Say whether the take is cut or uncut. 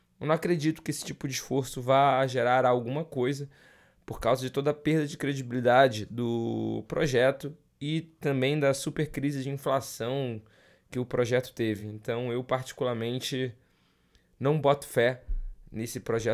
uncut